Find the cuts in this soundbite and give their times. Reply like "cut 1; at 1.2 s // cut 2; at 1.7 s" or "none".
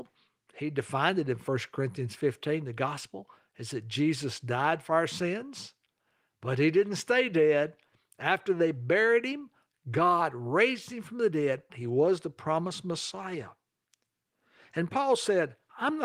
cut 1; at 11.7 s